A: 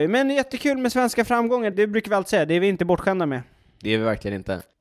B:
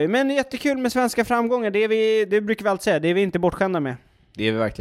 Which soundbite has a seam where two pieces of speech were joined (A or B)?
A